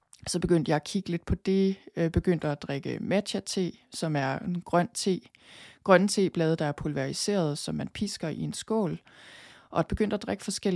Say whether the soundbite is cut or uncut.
uncut